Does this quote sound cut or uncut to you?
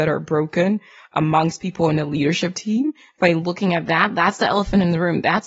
uncut